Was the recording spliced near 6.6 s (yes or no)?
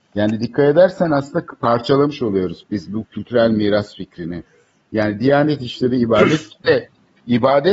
yes